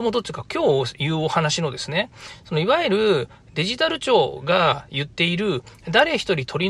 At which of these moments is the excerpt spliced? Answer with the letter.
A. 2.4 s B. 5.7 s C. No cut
C